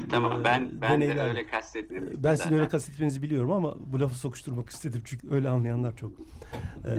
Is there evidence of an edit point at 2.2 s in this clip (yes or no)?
no